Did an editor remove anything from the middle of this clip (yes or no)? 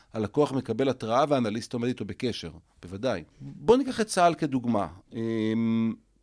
yes